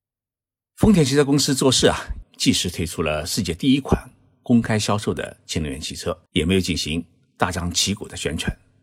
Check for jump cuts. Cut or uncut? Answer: cut